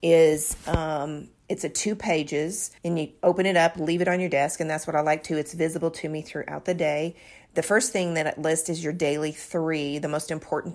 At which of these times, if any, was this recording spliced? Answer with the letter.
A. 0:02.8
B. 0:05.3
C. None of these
A